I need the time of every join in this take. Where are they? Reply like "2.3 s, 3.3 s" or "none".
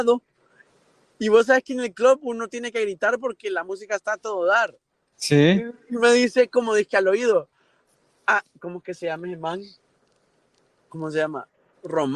none